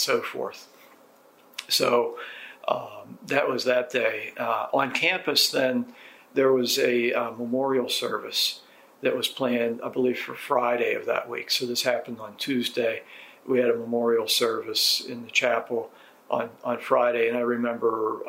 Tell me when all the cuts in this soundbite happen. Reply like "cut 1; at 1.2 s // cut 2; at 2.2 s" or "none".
none